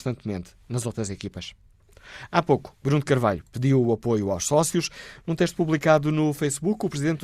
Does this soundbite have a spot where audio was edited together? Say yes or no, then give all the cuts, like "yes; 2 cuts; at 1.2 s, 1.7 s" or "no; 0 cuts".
no; 0 cuts